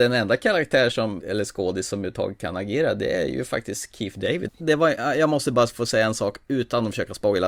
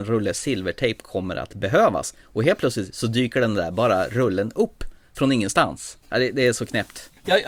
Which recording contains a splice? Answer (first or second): first